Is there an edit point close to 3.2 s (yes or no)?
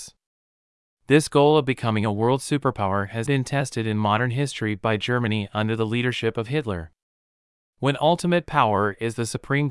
yes